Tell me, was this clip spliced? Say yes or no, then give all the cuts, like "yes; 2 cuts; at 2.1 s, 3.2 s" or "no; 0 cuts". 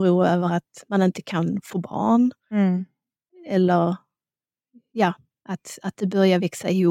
no; 0 cuts